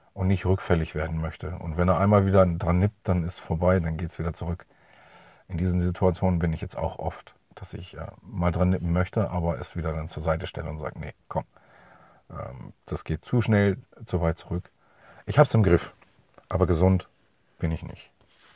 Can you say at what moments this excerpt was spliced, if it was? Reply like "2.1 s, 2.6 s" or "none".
13.2 s